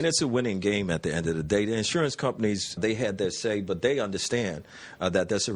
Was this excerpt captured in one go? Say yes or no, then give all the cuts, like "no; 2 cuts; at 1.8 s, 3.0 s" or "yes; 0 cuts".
no; 1 cut; at 2.8 s